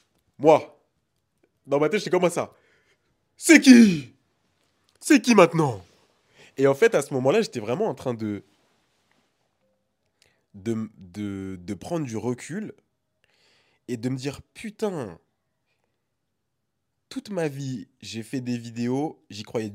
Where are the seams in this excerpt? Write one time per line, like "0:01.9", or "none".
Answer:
none